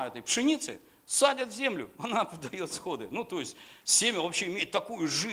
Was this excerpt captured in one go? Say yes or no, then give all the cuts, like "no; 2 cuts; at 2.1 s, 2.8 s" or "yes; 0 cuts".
yes; 0 cuts